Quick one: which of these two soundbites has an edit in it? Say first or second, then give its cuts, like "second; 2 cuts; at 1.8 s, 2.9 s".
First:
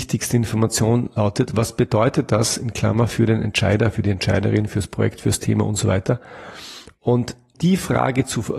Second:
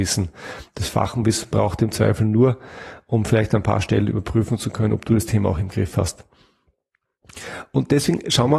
first; 1 cut; at 7.5 s